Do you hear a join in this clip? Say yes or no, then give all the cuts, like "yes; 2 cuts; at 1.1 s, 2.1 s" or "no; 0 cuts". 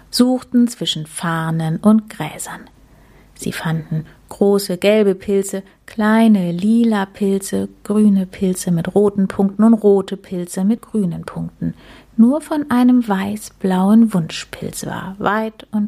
no; 0 cuts